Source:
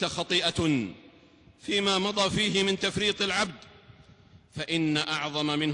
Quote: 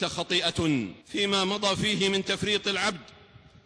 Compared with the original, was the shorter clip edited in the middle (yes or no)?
yes